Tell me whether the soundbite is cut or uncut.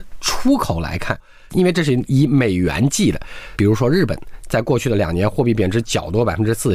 cut